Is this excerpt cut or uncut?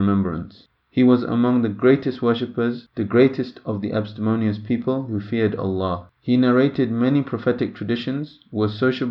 uncut